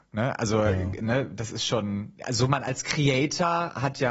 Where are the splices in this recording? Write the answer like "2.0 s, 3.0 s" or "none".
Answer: none